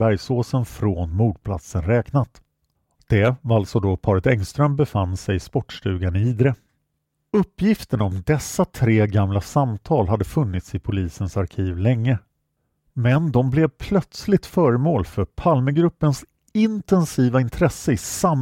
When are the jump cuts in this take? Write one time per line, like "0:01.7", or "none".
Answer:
0:02.9